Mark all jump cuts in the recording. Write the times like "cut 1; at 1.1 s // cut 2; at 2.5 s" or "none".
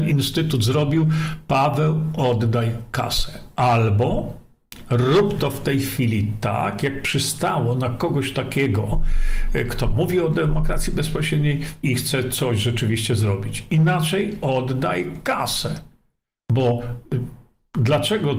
cut 1; at 11.8 s